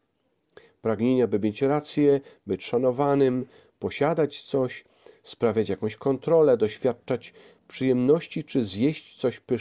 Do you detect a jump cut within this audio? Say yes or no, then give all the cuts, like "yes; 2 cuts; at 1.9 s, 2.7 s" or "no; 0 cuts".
no; 0 cuts